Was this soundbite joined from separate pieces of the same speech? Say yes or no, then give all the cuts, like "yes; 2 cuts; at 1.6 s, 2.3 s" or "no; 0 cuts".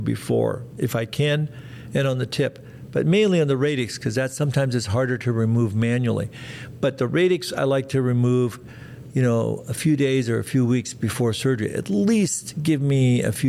no; 0 cuts